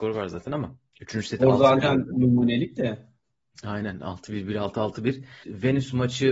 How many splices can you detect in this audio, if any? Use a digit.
1